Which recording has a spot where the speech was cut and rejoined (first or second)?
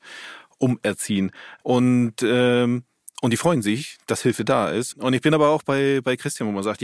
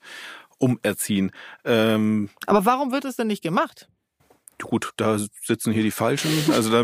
first